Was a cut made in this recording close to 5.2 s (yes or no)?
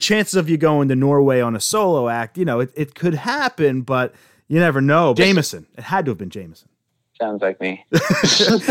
yes